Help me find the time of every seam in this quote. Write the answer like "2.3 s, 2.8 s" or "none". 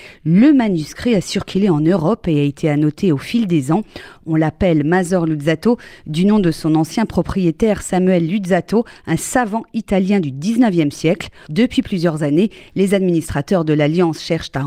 11.5 s